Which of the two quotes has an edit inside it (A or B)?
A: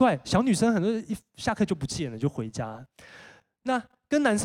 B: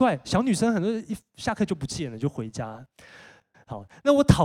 B